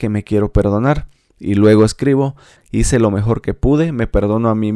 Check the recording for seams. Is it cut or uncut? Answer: cut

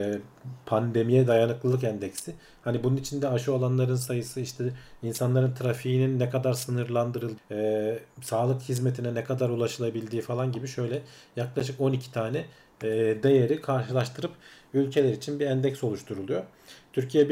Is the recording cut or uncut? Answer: cut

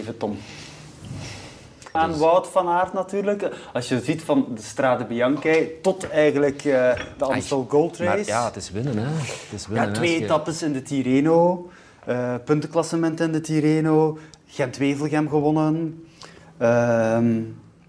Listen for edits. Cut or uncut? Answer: cut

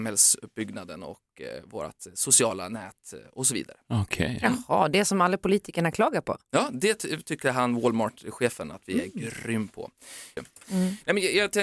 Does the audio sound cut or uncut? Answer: cut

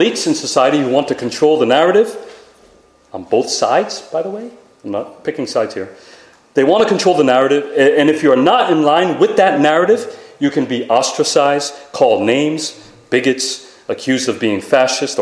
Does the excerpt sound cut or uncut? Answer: uncut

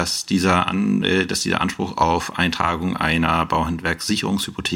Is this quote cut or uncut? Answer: uncut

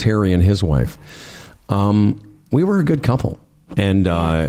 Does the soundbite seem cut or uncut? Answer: uncut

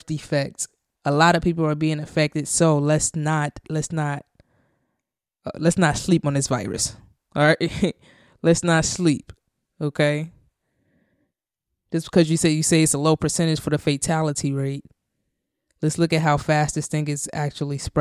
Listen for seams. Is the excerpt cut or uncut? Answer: uncut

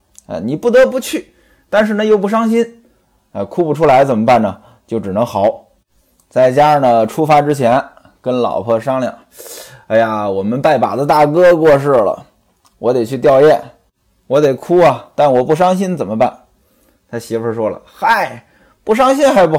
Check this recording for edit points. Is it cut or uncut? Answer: uncut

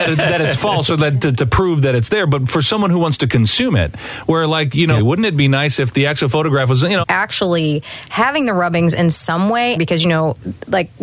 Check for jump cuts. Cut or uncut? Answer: cut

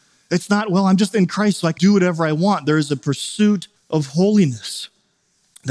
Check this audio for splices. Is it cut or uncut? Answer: cut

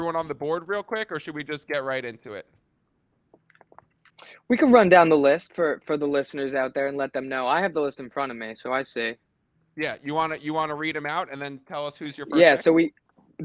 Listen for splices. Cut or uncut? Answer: uncut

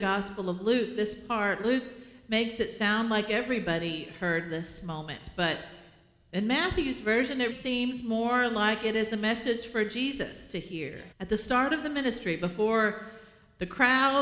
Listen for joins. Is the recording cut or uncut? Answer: cut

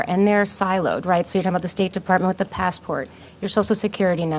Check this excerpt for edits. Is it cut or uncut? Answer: uncut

